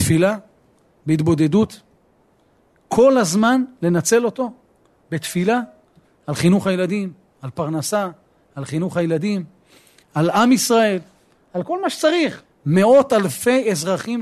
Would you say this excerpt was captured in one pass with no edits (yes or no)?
no